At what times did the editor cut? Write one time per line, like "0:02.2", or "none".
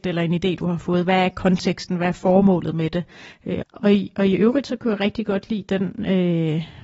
0:03.6